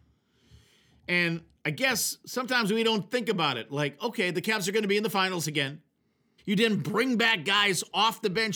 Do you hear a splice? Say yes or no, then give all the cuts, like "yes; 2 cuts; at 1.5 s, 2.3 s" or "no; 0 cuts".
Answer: yes; 1 cut; at 6.4 s